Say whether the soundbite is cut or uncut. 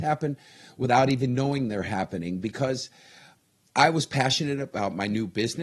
uncut